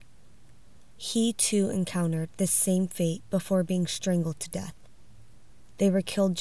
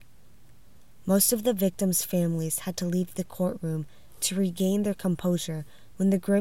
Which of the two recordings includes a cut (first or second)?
first